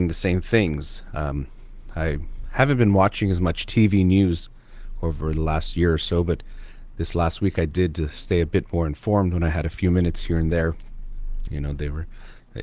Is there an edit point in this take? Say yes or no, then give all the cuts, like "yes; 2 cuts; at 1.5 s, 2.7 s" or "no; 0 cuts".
yes; 1 cut; at 11.5 s